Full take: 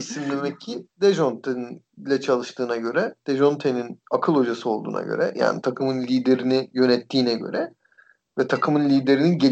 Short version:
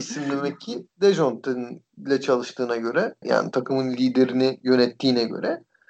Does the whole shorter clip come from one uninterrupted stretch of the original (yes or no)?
no